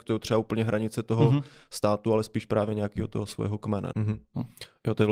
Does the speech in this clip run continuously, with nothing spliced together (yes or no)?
no